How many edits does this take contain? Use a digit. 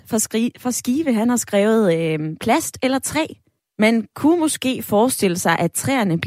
1